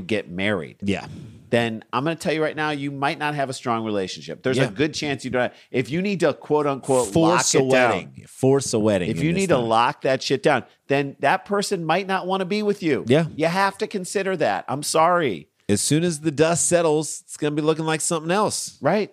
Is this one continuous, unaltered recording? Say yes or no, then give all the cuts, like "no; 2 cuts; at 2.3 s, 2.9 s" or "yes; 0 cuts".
yes; 0 cuts